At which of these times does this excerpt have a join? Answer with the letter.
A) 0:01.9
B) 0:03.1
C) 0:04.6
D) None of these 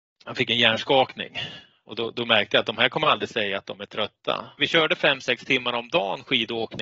C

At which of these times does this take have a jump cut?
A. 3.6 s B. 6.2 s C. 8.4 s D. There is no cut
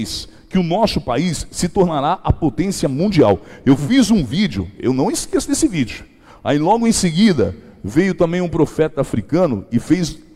D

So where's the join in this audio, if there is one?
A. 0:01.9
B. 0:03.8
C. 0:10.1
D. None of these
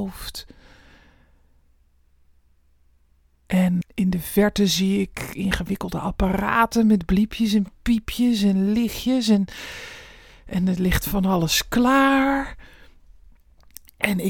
B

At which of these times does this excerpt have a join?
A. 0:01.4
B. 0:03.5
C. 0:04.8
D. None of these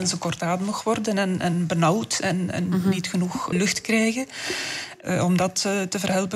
B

